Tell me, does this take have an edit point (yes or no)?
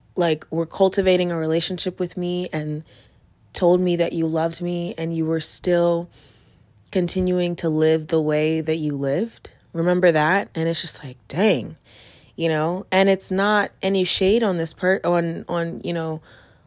no